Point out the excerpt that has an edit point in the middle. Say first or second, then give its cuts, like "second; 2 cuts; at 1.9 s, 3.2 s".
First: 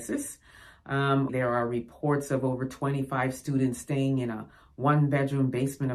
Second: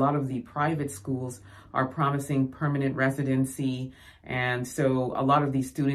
first; 1 cut; at 1.3 s